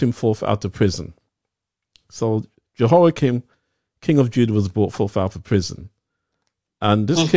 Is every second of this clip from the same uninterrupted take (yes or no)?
yes